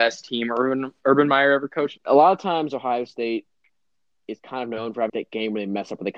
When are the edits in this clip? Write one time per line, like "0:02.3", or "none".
0:02.0
0:05.1